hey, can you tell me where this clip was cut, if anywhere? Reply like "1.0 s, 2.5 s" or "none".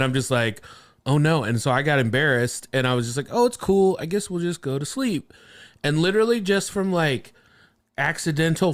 none